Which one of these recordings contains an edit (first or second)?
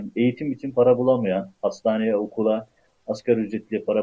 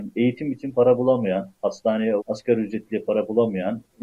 second